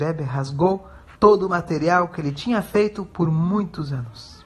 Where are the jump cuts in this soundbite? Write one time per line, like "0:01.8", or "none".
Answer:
0:01.2